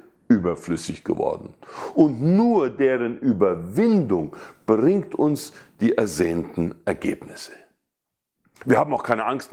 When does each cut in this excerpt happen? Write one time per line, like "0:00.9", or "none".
none